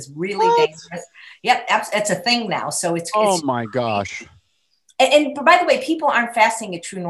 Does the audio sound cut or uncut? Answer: uncut